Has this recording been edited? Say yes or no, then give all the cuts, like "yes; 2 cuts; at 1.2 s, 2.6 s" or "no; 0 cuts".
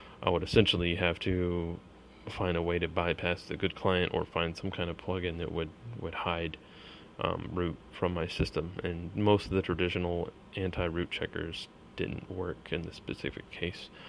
no; 0 cuts